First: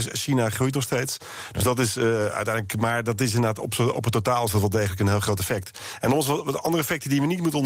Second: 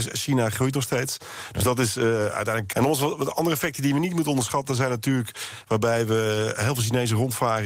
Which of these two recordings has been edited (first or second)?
second